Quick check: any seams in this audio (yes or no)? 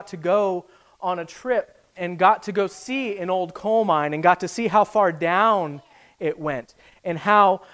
yes